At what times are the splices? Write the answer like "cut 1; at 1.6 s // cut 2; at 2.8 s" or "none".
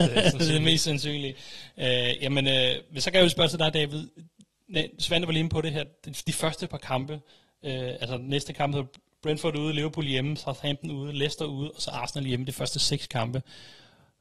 none